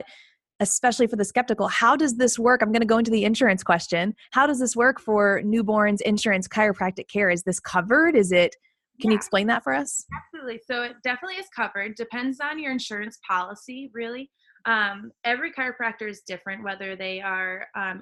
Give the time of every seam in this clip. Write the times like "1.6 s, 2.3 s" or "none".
none